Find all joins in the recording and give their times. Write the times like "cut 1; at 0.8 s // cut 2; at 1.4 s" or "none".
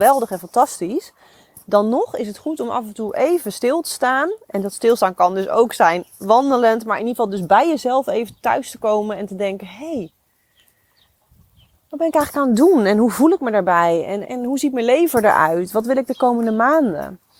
cut 1; at 14.2 s // cut 2; at 15.7 s